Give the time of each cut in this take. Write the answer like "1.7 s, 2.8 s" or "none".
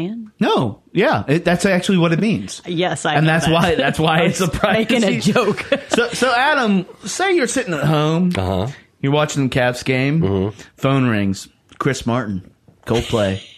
none